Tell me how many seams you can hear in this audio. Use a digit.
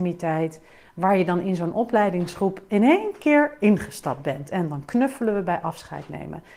0